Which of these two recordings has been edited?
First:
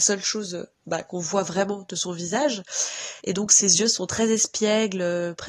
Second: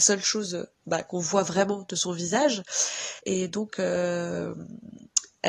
second; 1 cut; at 3.2 s

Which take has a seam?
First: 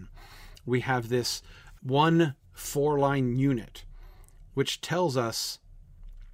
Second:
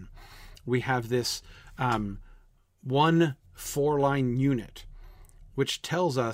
first; 1 cut; at 1.8 s

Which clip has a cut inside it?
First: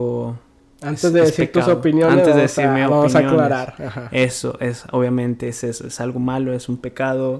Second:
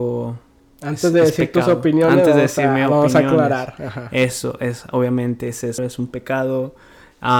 second; 1 cut; at 5.8 s

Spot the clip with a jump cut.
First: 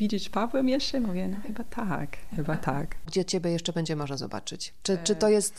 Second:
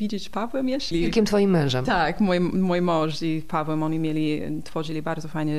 second; 1 cut; at 0.9 s

